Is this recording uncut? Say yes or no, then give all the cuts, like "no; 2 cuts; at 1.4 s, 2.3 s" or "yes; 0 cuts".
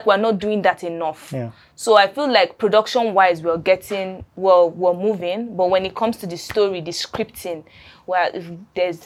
no; 1 cut; at 4.3 s